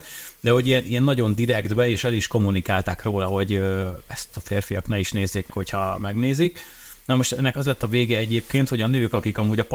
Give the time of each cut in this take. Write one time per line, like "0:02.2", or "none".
0:05.5